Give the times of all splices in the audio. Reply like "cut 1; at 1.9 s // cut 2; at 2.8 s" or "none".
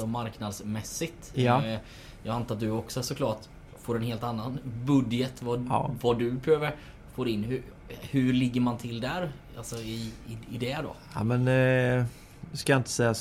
none